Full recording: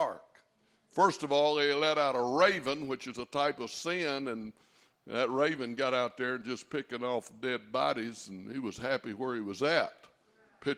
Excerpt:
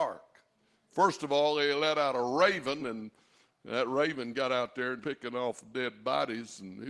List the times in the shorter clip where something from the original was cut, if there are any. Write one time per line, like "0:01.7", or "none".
0:02.8
0:05.0